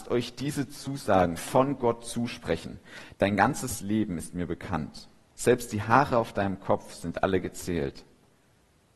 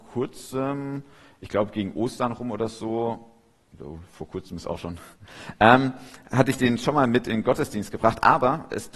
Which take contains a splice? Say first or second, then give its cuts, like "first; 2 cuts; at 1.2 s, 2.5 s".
first; 1 cut; at 3.1 s